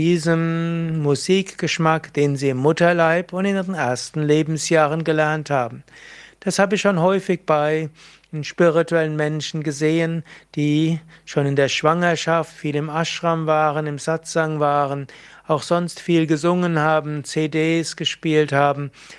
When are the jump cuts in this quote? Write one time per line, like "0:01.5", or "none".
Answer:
none